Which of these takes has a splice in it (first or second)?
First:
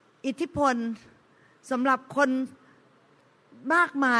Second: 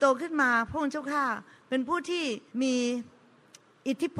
second